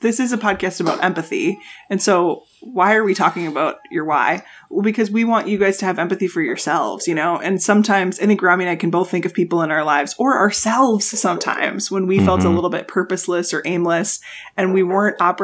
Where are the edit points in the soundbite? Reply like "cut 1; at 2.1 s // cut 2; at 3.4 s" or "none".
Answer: none